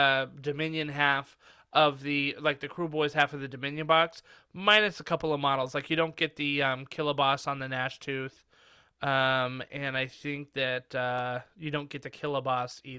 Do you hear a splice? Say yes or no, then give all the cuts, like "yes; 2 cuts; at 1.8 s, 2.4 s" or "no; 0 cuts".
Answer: no; 0 cuts